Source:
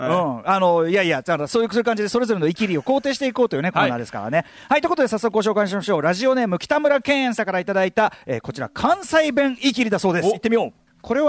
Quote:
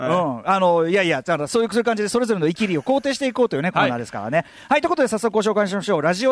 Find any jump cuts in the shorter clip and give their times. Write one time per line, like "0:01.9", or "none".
none